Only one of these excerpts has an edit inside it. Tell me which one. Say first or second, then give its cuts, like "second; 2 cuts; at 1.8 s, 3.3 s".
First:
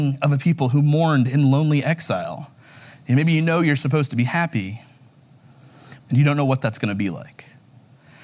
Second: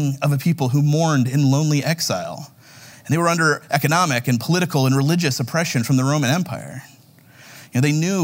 first; 2 cuts; at 2.9 s, 6.0 s